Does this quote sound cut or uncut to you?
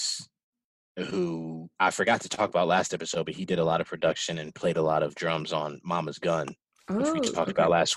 uncut